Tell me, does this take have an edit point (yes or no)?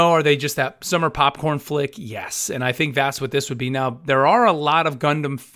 no